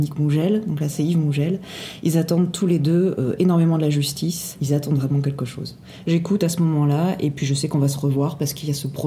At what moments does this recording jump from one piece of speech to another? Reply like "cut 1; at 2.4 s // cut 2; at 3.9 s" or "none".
cut 1; at 4.6 s // cut 2; at 6.0 s